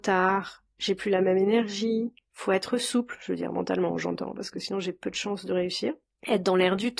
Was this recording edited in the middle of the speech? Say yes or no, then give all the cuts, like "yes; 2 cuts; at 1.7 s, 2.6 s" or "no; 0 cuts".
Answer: no; 0 cuts